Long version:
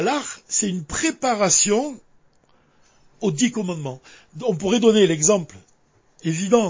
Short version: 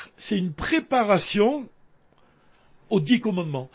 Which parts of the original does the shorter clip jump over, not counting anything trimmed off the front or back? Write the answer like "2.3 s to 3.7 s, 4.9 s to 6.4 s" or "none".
none